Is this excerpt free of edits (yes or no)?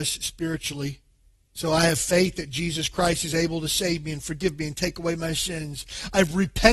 no